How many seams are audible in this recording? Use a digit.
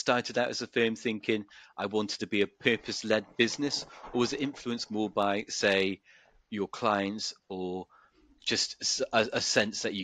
1